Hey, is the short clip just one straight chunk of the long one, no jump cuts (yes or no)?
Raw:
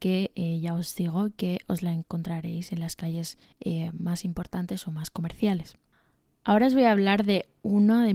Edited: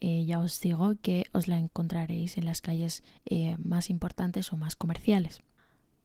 yes